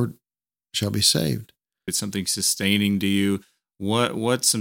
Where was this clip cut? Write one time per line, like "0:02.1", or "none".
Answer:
0:01.9